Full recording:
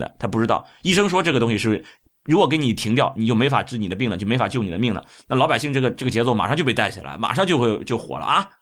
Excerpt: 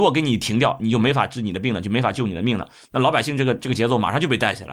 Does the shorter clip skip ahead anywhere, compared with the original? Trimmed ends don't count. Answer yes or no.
no